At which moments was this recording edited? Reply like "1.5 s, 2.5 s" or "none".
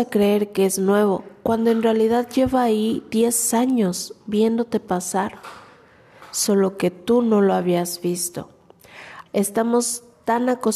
9.3 s